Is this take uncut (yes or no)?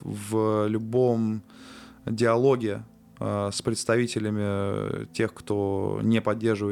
yes